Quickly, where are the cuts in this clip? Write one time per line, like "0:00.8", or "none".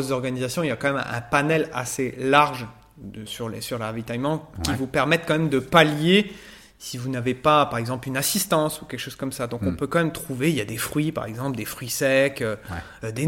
0:03.3